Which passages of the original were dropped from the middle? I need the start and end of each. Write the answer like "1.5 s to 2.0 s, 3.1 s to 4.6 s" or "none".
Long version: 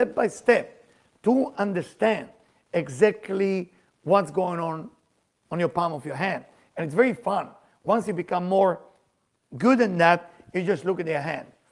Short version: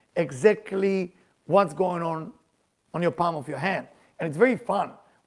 none